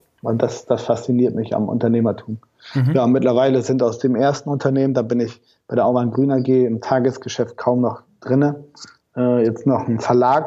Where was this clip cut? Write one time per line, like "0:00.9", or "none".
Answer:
none

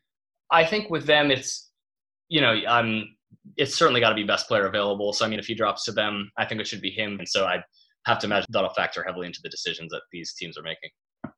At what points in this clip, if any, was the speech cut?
0:05.4
0:07.2
0:08.5

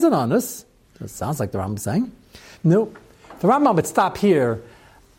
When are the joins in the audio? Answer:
0:02.6

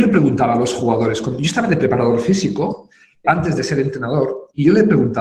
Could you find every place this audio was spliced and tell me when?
0:03.2

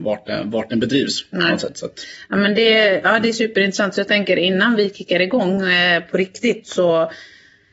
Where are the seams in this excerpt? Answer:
none

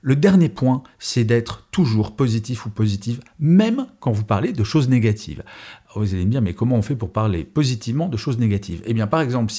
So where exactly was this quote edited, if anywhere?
none

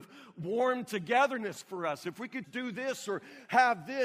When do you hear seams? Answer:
0:02.4

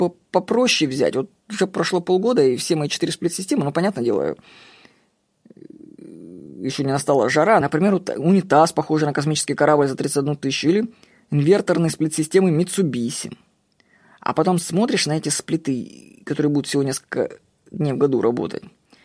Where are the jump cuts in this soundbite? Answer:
0:07.6

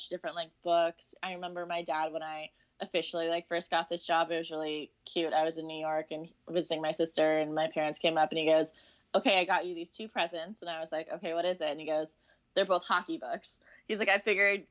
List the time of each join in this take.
none

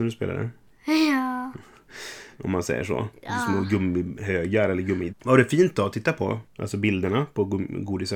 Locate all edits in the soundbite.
0:02.4
0:05.1
0:06.5

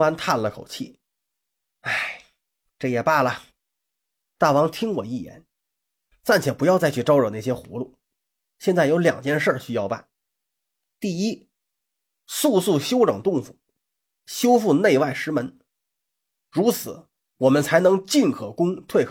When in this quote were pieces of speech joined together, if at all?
none

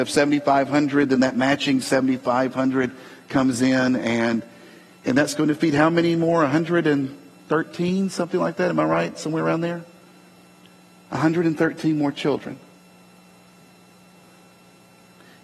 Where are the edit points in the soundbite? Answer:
none

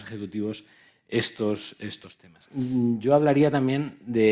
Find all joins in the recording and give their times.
none

